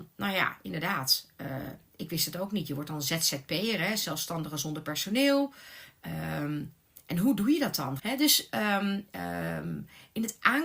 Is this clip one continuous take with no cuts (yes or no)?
no